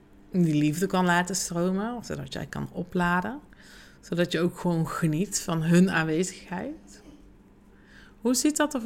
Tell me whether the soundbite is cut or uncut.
uncut